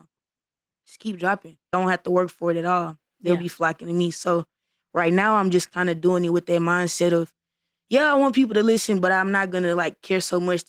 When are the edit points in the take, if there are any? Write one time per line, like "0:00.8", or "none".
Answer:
0:01.7